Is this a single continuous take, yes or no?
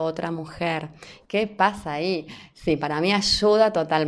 no